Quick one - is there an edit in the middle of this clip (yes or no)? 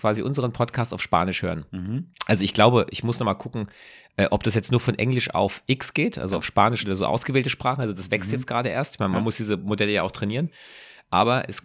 yes